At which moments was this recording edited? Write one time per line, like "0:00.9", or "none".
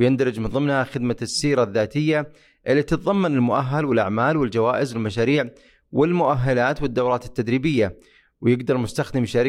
none